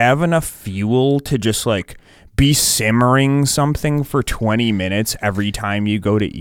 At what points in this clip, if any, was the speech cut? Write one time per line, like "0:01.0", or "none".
none